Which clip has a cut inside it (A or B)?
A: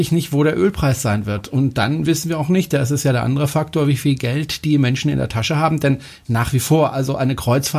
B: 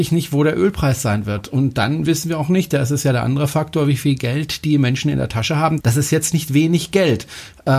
B